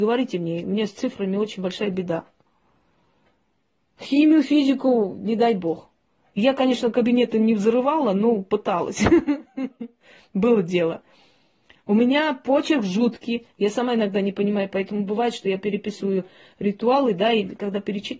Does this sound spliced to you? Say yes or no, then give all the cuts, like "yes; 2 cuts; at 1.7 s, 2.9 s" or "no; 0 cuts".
no; 0 cuts